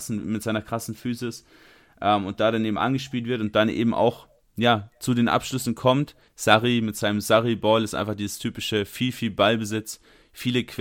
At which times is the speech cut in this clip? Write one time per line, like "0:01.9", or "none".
0:06.3